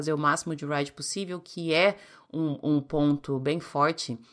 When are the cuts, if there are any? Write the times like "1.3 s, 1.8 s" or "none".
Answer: none